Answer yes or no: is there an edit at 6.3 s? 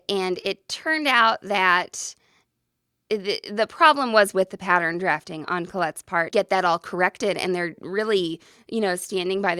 yes